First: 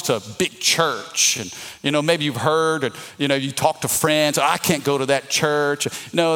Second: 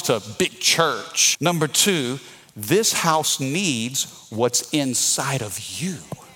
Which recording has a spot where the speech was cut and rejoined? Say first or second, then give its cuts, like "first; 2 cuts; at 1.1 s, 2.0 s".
second; 1 cut; at 1.3 s